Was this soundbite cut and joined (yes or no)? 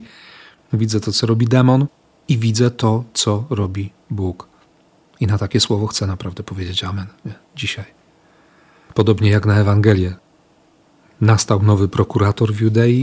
no